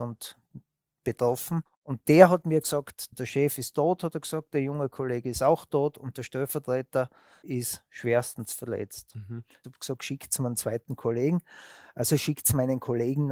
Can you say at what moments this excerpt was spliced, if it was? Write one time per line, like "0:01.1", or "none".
0:07.4
0:09.6